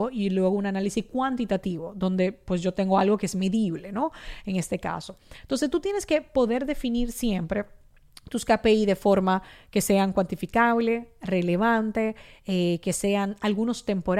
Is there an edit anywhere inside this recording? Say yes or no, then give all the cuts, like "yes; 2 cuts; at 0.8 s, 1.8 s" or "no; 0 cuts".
no; 0 cuts